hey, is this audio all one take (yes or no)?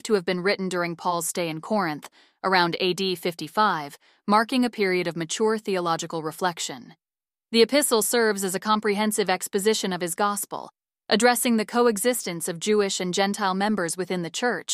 no